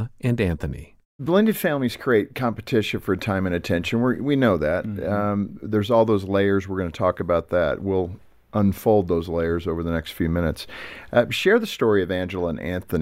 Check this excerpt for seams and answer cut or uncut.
uncut